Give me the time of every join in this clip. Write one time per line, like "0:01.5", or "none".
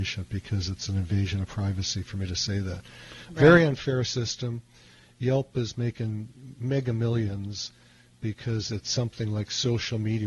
none